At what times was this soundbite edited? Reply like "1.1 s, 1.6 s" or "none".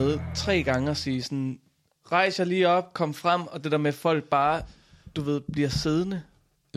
none